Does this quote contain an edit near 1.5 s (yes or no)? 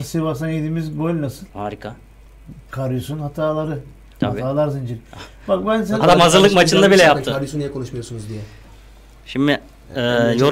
yes